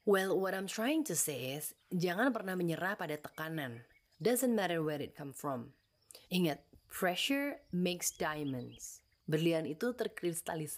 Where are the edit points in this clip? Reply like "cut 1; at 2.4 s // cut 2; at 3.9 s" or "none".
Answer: cut 1; at 6.2 s // cut 2; at 9.2 s